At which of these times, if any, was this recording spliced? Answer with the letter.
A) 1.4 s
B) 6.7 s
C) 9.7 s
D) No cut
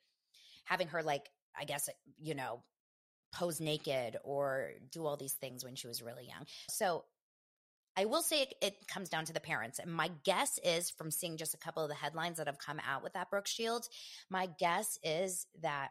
B